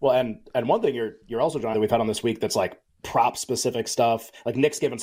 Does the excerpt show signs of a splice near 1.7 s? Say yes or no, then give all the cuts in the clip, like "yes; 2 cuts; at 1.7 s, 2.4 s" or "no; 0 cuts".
yes; 2 cuts; at 1.7 s, 3.0 s